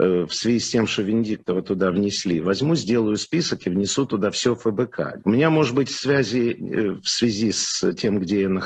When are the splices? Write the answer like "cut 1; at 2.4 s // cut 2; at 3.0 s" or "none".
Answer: cut 1; at 5.2 s